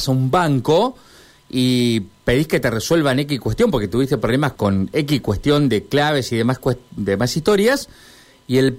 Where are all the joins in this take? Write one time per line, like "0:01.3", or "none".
0:04.5